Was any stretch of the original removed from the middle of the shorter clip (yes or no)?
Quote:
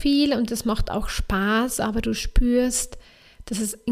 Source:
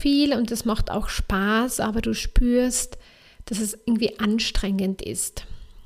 no